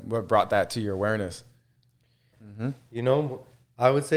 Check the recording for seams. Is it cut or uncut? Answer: cut